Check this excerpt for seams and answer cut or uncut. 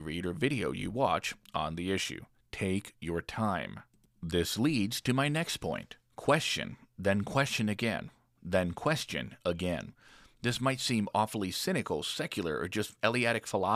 uncut